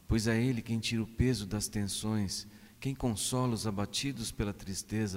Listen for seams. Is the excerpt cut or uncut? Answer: cut